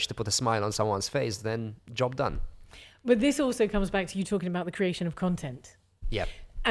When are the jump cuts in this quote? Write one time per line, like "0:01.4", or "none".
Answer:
none